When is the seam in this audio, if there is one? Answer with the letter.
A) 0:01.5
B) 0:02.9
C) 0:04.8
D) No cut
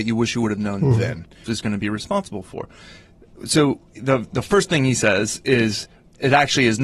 A